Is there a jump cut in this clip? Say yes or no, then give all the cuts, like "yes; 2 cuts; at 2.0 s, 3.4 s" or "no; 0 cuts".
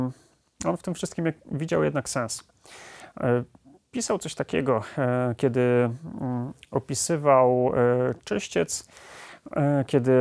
no; 0 cuts